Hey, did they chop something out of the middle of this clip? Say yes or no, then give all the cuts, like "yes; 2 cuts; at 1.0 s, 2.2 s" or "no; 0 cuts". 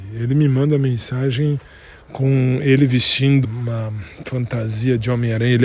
yes; 1 cut; at 3.4 s